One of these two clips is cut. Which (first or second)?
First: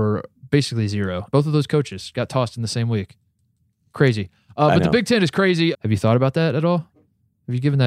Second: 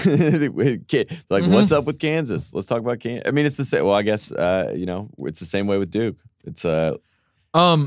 first